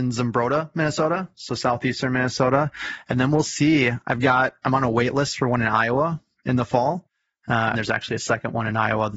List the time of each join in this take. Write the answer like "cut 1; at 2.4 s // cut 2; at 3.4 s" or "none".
cut 1; at 7.7 s